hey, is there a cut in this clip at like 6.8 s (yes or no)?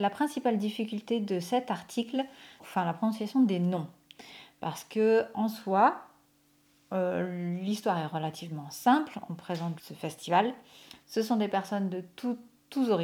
no